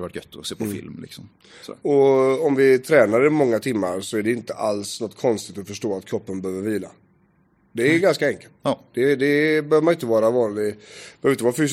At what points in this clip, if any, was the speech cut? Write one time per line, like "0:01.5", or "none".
none